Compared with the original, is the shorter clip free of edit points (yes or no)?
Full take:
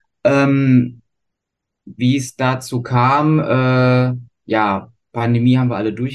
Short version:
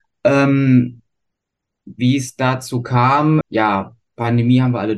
no